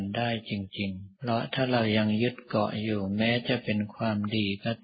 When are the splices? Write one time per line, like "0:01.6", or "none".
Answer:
0:01.2